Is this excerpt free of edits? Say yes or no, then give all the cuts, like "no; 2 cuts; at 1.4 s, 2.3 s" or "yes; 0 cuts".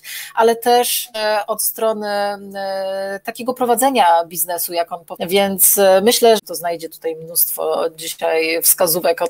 no; 2 cuts; at 5.2 s, 6.4 s